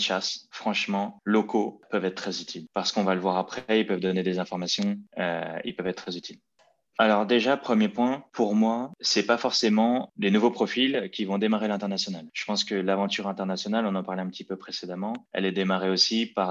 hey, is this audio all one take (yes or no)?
no